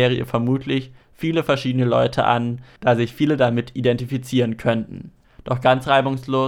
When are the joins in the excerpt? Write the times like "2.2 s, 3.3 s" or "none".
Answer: 5.2 s